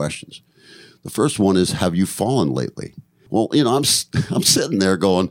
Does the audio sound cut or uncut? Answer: uncut